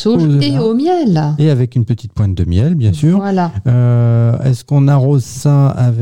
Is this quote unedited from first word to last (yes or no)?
yes